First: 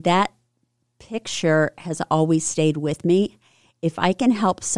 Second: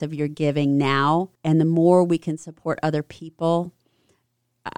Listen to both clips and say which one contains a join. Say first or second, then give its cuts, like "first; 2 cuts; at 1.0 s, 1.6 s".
second; 1 cut; at 1.4 s